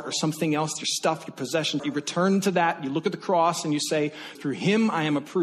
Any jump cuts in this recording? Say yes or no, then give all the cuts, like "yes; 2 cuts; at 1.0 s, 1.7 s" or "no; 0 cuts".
yes; 2 cuts; at 1.8 s, 4.4 s